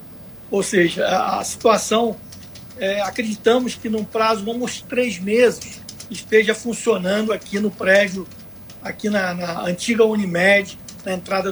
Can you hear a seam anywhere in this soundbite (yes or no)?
yes